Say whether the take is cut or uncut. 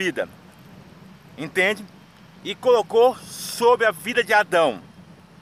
uncut